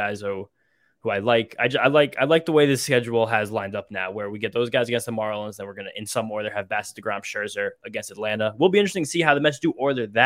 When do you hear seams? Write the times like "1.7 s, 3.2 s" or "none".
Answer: none